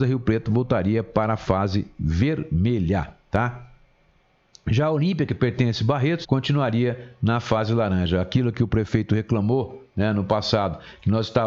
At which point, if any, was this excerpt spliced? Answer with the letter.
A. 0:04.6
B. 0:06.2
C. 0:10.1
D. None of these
B